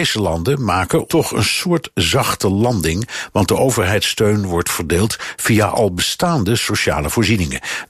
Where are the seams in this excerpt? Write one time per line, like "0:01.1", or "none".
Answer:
0:01.1